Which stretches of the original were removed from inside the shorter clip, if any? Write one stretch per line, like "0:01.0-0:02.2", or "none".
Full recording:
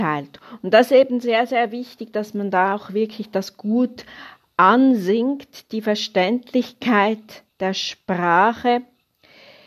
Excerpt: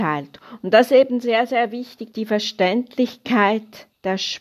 0:02.1-0:05.7